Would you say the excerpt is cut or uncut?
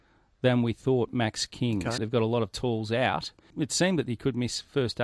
cut